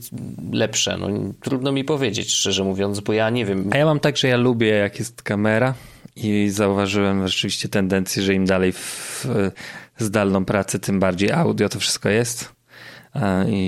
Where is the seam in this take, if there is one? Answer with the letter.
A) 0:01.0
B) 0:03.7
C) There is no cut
B